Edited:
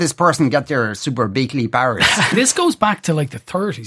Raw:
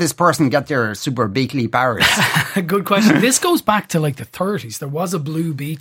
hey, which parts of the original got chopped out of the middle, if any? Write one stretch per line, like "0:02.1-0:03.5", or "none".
0:02.3-0:03.2

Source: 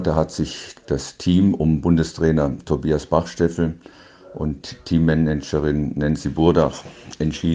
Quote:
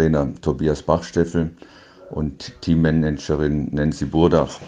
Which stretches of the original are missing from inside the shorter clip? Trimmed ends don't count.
none

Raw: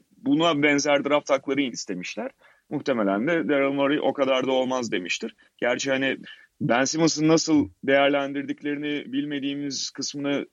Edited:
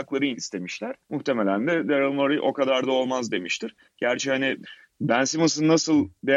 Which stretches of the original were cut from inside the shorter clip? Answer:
0:02.4-0:02.6

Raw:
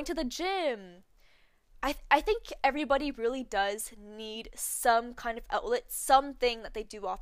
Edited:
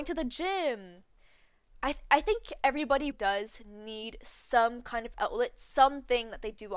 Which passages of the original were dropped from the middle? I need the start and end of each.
0:03.1-0:03.4

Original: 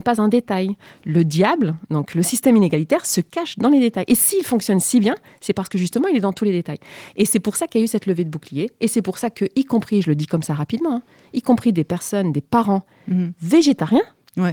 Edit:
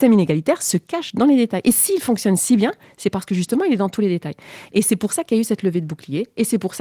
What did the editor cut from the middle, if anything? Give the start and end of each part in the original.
none

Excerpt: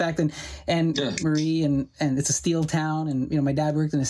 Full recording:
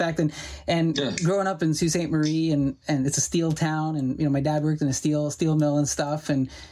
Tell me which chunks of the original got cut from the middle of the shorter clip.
0:01.2-0:02.1

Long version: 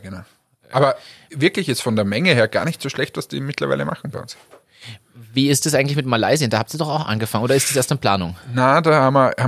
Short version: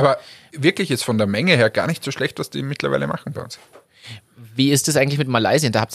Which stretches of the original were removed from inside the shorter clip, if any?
none

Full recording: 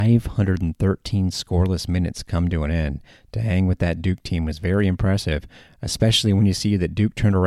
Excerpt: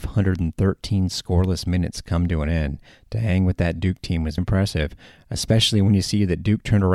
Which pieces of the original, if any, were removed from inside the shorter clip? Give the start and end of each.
0:04.6-0:04.9

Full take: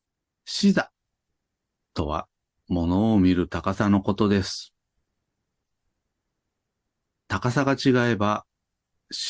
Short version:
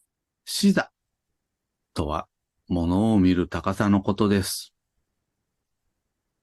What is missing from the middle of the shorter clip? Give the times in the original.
none

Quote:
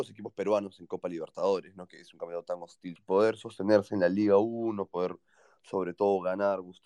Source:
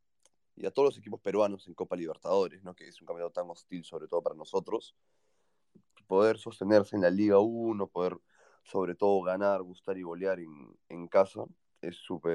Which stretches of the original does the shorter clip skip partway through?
0:03.8-0:06.0

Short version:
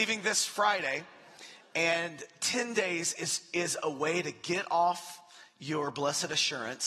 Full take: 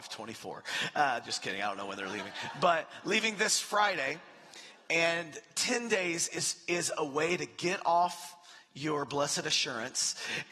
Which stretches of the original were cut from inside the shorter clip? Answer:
none

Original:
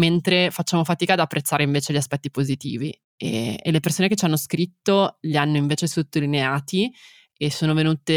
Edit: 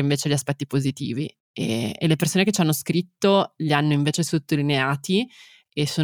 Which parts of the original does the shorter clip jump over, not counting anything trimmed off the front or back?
none

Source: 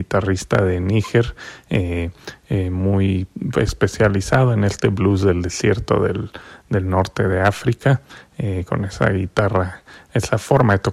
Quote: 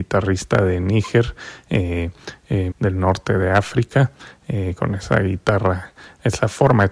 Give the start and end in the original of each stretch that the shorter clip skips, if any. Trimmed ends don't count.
0:02.7-0:06.6

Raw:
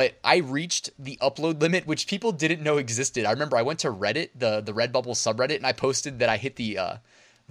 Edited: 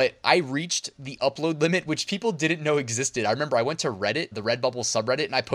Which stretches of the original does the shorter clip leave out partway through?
0:04.3-0:04.6

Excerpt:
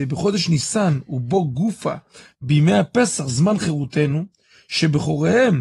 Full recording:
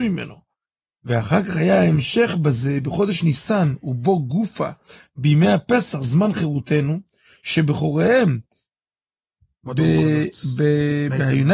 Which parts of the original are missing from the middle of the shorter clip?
none

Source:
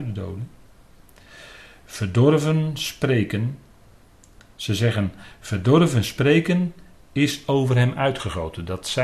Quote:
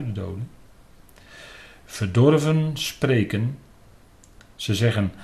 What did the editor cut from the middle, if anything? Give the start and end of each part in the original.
none

